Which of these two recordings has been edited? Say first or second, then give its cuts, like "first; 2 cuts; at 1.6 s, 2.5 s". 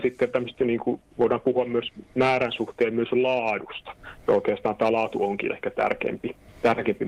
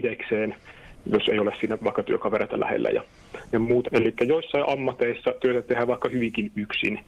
second; 1 cut; at 3.8 s